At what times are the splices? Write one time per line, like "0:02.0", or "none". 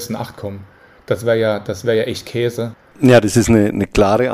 0:02.9